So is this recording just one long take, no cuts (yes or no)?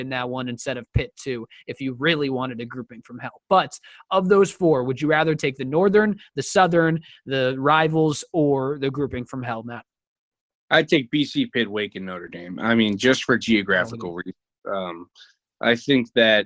yes